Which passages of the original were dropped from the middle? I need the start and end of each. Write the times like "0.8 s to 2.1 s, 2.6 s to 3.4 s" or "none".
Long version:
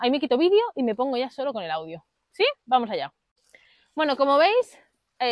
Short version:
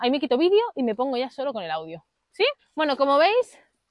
2.6 s to 3.8 s